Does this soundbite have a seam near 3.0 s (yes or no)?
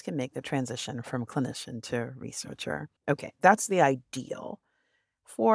yes